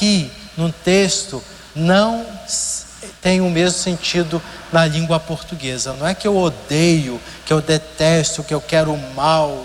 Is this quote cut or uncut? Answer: uncut